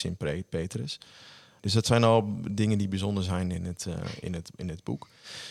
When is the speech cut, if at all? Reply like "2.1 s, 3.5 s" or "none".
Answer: 1.6 s